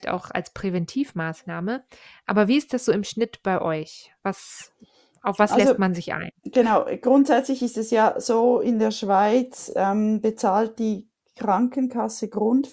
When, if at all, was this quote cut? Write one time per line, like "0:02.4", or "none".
none